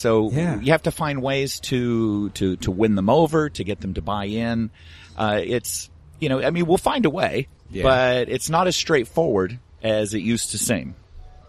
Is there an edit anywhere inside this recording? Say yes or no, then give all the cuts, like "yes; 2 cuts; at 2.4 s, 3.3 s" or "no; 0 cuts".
no; 0 cuts